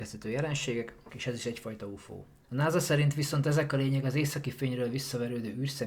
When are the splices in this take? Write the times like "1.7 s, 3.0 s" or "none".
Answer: 1.1 s, 2.4 s